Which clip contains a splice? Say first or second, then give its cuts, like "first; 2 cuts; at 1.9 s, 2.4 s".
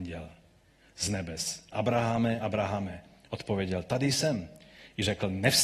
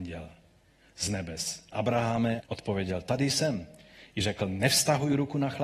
second; 1 cut; at 2.4 s